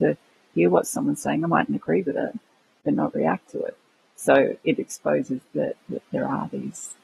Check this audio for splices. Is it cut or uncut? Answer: uncut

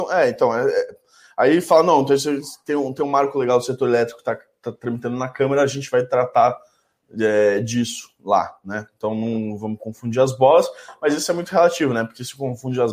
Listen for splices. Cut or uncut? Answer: uncut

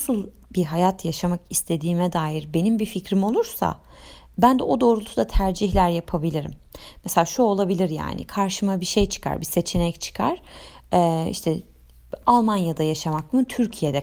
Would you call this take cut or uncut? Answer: uncut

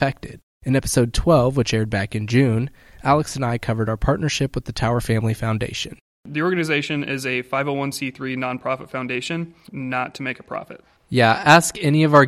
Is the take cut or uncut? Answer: cut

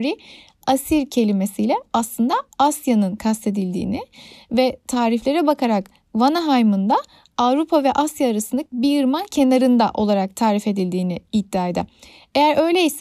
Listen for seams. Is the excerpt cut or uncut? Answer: uncut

